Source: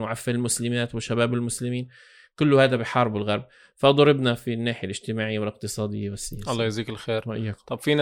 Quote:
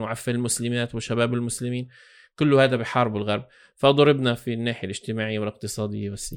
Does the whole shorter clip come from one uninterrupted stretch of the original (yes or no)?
yes